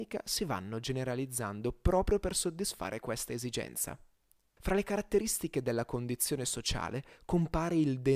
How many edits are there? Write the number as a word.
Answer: one